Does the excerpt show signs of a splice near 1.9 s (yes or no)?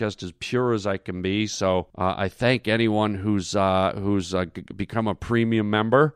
yes